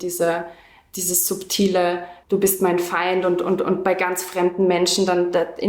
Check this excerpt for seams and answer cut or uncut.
cut